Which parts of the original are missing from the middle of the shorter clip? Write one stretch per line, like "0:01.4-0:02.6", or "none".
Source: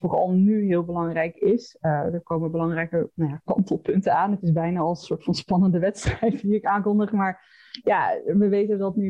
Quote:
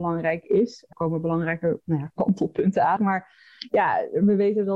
0:01.8-0:02.2
0:04.3-0:07.1